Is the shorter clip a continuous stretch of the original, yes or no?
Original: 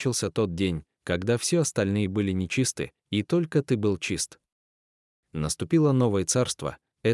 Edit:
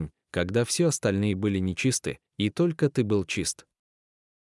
yes